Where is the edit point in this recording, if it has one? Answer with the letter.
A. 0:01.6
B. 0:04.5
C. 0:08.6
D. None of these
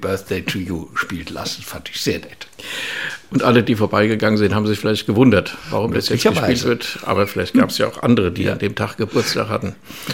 D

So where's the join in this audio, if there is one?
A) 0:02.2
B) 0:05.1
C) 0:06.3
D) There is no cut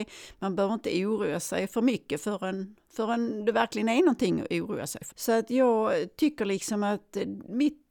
B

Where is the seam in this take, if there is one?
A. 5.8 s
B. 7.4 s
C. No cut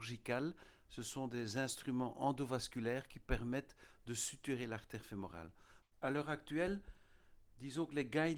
A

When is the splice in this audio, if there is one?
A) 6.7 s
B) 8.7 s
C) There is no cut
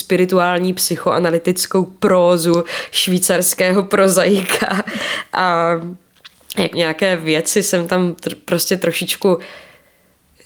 A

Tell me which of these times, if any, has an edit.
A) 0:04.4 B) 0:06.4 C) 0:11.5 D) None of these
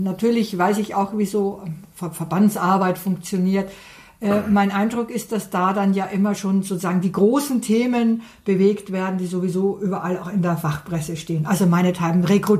D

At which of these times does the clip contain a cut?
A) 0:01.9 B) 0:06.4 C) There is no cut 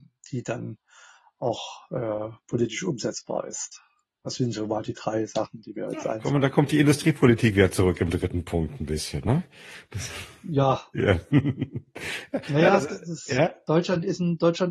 C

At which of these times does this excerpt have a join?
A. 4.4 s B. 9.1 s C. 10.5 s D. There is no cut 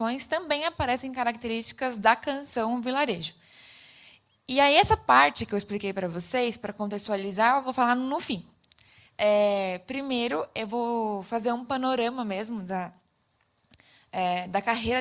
D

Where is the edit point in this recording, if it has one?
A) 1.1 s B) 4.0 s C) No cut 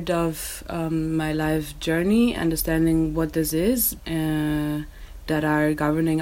B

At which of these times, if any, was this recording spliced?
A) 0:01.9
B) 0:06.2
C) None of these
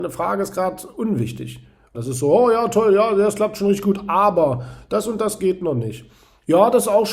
A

